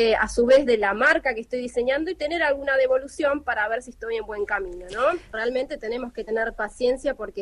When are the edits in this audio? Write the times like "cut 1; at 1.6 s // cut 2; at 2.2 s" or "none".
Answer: none